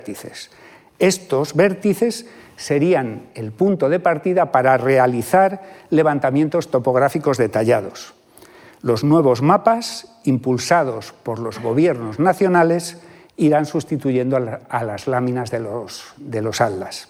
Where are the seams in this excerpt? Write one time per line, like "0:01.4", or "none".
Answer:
none